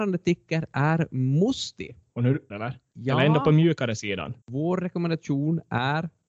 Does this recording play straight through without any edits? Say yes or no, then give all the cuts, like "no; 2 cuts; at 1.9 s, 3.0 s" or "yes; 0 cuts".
no; 2 cuts; at 2.5 s, 4.4 s